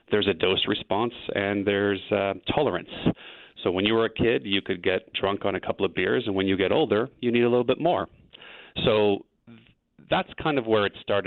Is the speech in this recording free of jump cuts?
no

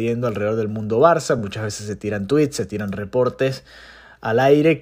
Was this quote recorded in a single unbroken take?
yes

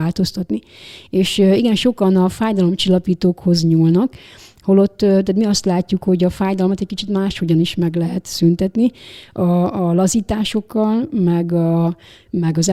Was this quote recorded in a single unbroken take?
yes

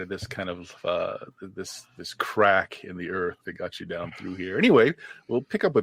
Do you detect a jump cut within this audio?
no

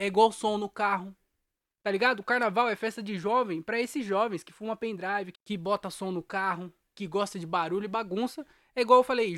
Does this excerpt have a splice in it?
yes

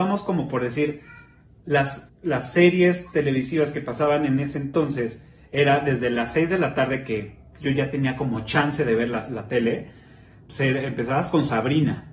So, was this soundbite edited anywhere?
yes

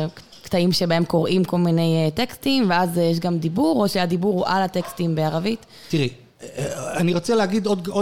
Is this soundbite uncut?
yes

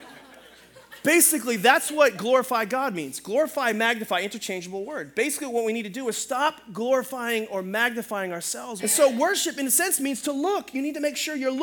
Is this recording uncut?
no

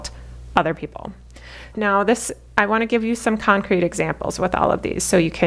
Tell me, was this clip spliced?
yes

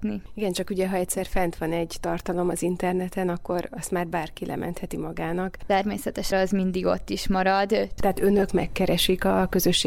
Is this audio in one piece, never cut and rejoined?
no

